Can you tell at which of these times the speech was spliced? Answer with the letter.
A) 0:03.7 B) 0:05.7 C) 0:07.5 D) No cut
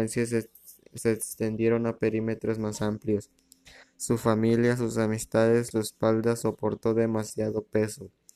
B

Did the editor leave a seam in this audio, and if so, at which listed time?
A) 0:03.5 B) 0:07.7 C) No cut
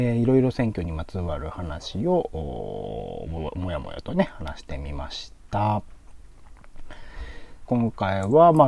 B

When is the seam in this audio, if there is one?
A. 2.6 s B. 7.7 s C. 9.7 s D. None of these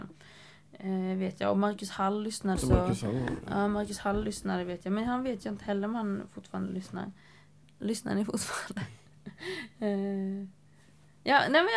A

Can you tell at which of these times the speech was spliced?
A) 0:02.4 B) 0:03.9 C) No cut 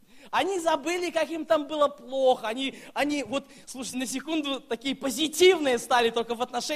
B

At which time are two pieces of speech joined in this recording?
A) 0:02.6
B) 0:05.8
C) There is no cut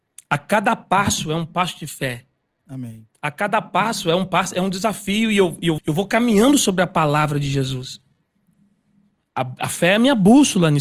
B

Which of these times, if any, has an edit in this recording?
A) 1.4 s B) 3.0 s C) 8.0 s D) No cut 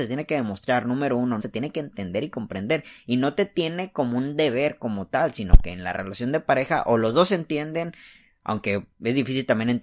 A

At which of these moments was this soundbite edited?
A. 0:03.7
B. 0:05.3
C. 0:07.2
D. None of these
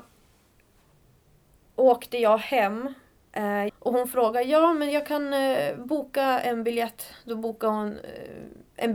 A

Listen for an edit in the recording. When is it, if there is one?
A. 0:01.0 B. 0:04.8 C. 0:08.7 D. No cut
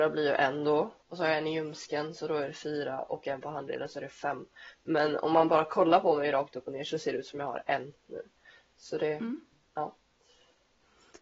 A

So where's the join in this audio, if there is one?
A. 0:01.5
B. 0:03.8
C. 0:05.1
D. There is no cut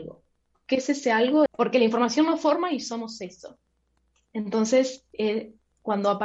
A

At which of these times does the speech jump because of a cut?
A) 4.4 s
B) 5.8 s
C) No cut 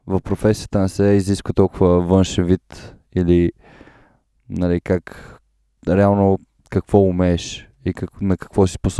B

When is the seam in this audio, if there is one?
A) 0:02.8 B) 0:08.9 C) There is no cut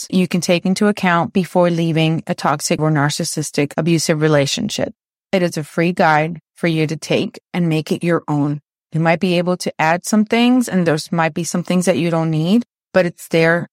A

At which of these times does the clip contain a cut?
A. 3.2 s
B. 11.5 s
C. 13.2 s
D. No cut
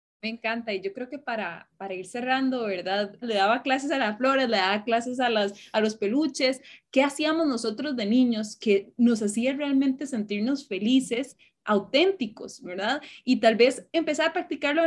A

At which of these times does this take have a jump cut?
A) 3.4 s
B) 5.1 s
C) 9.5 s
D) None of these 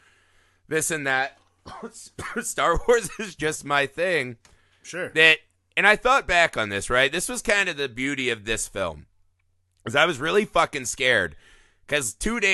D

